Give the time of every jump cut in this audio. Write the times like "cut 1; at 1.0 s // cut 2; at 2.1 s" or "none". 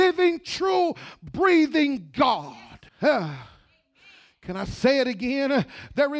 cut 1; at 2.9 s